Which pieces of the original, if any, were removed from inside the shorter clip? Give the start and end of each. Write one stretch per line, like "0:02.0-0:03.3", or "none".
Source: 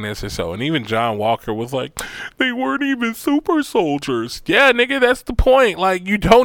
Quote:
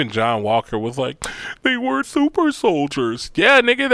0:02.8-0:03.1